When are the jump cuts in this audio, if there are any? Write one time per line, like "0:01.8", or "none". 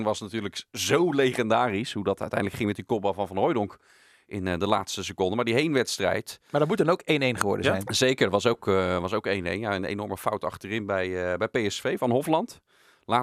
none